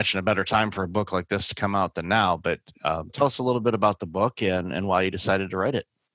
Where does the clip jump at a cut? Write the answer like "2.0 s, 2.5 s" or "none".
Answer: 3.1 s